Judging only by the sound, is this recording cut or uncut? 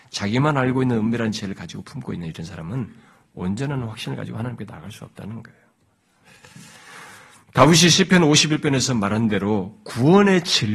uncut